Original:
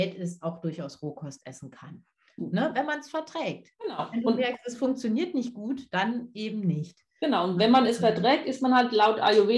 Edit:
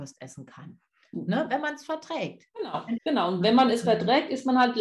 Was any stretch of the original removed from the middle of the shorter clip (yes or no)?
yes